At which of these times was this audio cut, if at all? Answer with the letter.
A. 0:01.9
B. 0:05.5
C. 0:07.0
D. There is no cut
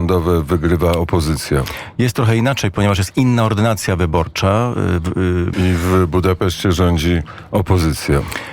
B